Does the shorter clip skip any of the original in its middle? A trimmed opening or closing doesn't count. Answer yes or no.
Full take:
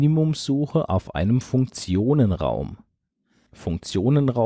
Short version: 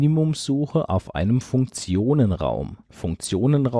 yes